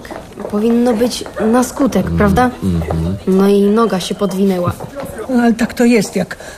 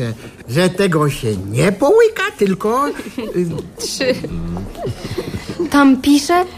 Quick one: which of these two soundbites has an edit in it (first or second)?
first